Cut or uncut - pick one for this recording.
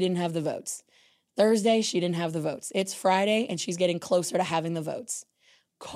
uncut